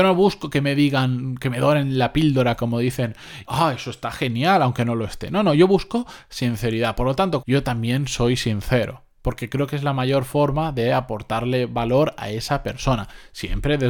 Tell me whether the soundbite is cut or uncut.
cut